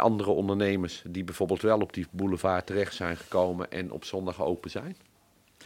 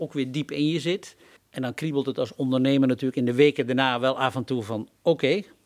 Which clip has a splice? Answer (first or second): second